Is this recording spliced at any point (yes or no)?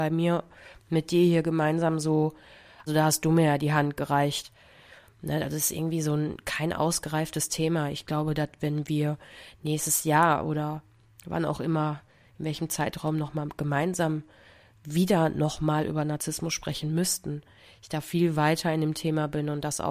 yes